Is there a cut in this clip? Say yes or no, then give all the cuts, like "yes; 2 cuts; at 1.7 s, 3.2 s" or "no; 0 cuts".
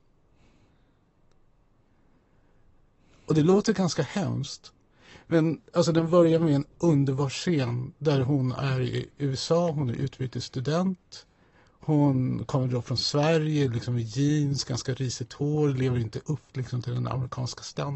no; 0 cuts